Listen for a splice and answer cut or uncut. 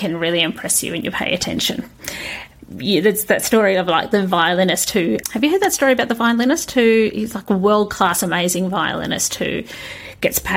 uncut